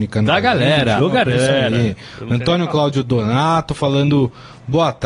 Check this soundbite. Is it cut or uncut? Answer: cut